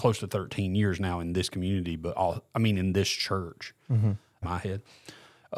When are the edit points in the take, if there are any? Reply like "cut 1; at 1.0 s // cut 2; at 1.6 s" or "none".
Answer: cut 1; at 4.4 s